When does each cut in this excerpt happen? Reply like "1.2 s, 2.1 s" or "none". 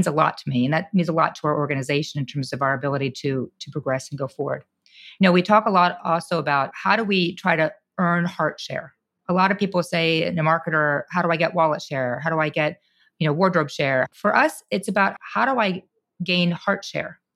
none